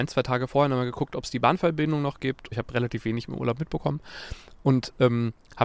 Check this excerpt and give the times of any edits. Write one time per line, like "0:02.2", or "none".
0:02.5